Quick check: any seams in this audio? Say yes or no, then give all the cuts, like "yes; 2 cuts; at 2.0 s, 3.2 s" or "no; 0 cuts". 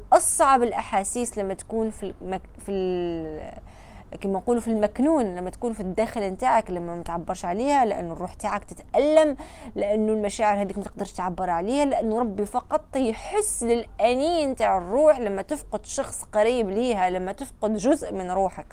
no; 0 cuts